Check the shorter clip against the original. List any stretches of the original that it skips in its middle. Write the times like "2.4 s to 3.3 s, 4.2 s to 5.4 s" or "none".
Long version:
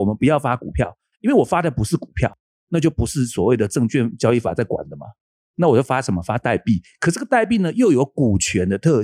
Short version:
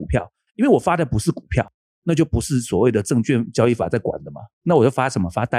5.2 s to 5.4 s